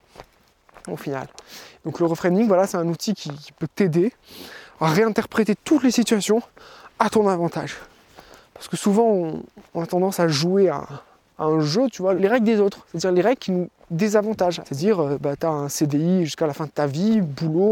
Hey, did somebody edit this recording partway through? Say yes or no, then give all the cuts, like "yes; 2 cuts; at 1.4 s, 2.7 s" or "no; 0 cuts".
yes; 2 cuts; at 12.2 s, 14.6 s